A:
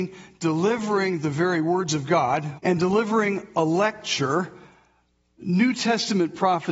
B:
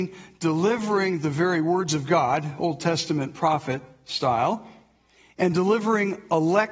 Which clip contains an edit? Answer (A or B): A